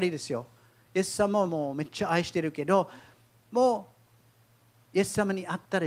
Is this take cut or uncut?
uncut